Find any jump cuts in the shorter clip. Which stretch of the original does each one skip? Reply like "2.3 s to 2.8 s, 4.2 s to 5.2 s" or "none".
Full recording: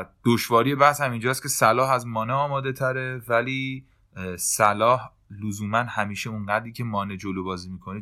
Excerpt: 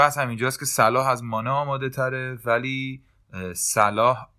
none